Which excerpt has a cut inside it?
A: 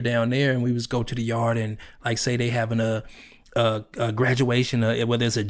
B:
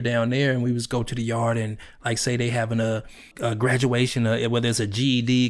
B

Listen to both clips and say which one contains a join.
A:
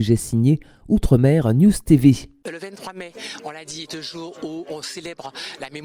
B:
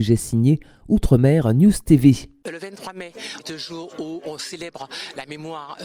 B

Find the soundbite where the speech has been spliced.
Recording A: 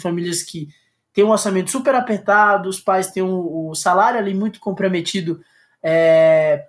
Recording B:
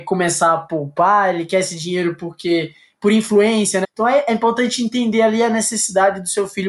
B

